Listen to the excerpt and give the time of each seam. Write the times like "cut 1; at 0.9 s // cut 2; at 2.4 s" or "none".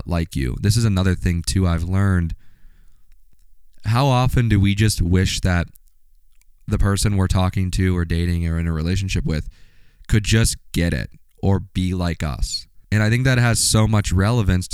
cut 1; at 12.8 s